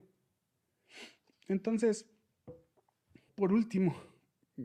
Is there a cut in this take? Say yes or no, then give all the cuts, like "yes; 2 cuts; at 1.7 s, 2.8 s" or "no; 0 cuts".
yes; 1 cut; at 3.3 s